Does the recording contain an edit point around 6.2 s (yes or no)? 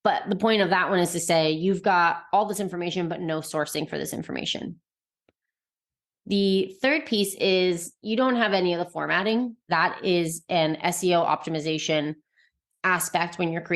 no